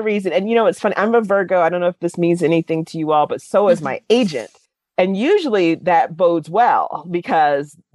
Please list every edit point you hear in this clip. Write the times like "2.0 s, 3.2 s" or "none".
none